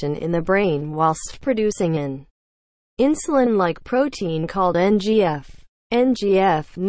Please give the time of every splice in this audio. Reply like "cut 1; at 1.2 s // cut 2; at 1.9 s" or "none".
none